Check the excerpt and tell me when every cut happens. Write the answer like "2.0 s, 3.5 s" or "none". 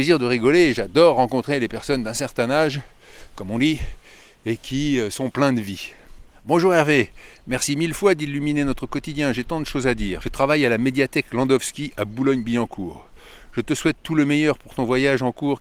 10.2 s